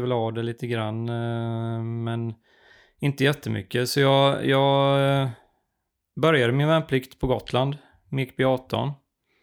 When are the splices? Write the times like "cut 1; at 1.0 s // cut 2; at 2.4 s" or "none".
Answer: none